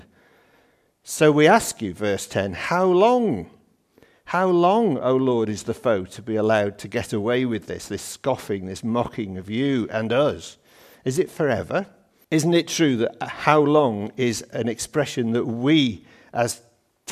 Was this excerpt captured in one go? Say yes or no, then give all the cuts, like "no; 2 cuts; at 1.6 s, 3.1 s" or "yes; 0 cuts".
no; 1 cut; at 12.2 s